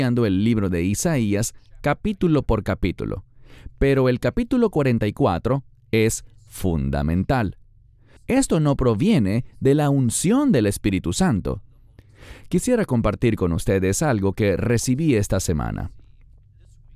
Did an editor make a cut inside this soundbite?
yes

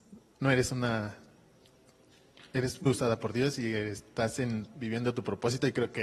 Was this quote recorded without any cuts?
no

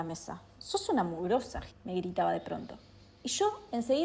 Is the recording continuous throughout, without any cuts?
no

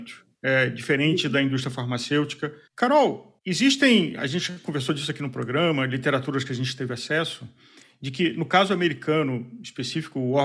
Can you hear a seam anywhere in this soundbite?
yes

